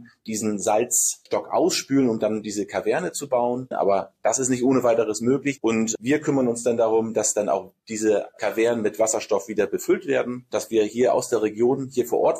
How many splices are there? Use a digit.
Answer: 2